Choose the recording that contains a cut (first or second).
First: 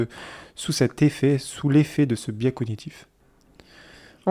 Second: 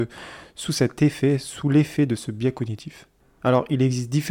second